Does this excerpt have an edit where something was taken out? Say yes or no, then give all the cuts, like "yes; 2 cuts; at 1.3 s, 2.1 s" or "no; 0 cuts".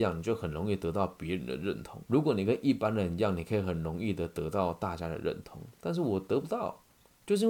yes; 1 cut; at 2.0 s